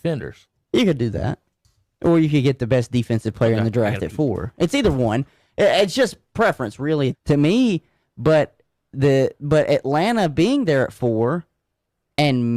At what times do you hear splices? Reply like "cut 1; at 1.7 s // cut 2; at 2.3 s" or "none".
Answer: cut 1; at 7.1 s

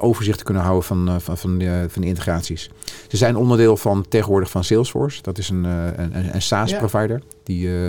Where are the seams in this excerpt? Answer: none

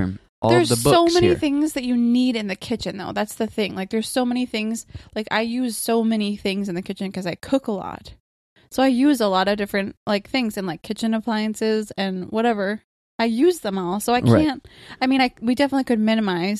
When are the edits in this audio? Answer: none

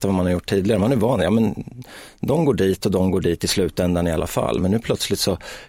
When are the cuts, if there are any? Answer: none

